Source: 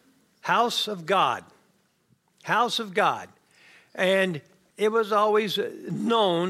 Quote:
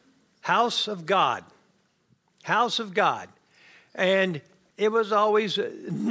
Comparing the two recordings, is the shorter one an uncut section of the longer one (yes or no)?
yes